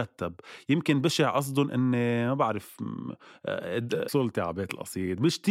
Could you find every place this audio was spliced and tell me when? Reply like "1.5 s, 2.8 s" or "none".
4.1 s